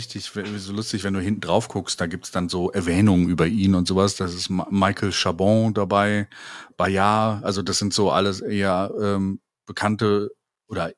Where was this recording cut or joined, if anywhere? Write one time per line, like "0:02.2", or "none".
none